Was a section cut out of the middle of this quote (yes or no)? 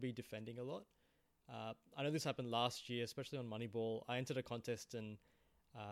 no